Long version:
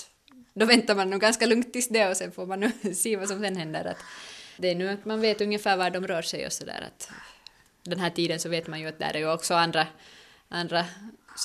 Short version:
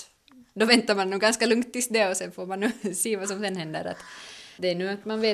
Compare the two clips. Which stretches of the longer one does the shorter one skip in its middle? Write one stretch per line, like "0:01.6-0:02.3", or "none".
none